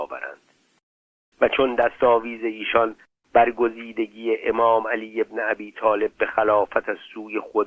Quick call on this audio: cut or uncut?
uncut